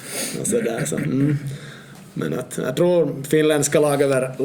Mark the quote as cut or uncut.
uncut